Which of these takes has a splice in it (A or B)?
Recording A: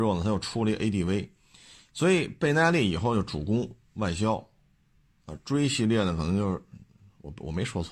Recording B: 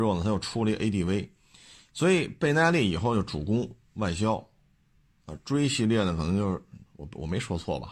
B